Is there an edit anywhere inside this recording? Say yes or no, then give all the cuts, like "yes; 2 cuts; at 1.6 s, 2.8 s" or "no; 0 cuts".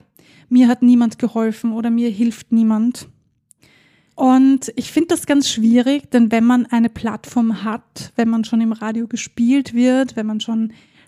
no; 0 cuts